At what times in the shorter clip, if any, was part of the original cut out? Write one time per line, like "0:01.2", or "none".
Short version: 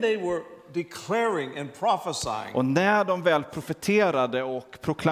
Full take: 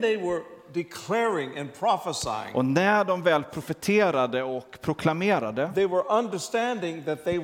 none